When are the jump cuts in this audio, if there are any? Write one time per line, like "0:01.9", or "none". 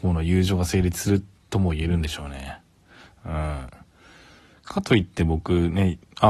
none